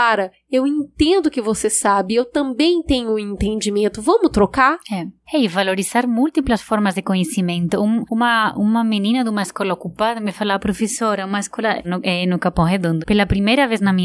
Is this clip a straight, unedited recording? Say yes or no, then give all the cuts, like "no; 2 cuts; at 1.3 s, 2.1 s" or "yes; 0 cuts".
no; 2 cuts; at 11.8 s, 13.0 s